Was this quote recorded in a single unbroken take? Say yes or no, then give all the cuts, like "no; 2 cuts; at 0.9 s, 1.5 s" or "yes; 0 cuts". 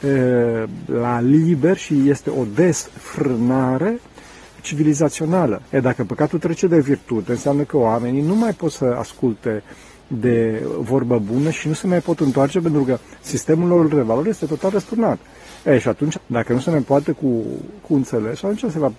no; 3 cuts; at 5.6 s, 16.1 s, 17.8 s